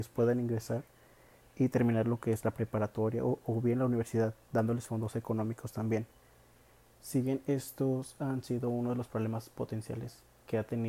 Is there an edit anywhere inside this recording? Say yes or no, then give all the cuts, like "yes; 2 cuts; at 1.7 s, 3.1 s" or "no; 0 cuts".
yes; 1 cut; at 6.9 s